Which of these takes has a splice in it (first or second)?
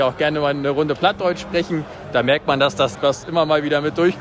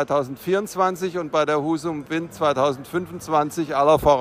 first